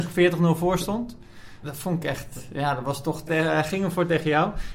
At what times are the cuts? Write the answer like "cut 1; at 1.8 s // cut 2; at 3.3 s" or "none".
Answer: cut 1; at 1.6 s // cut 2; at 3.3 s